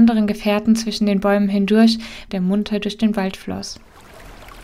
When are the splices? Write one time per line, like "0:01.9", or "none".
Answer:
0:02.3